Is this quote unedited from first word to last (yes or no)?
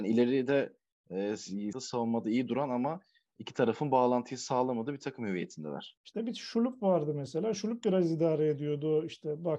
no